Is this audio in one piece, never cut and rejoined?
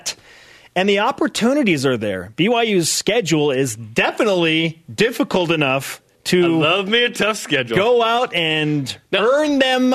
yes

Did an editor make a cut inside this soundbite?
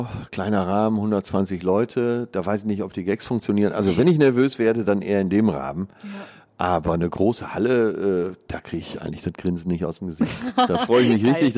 no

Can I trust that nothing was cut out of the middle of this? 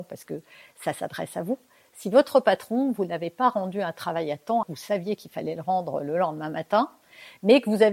no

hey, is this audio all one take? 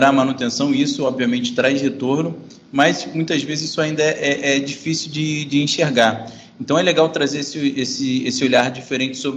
yes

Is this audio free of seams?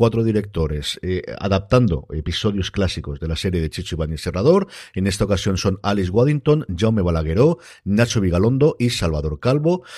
yes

